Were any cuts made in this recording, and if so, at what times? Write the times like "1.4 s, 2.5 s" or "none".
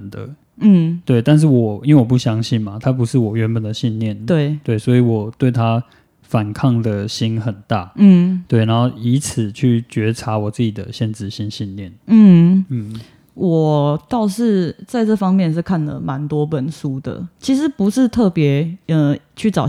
none